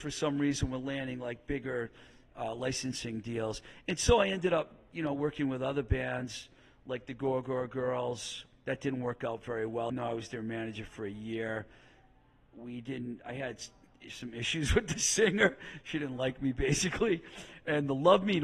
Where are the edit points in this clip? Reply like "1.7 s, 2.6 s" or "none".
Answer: 9.9 s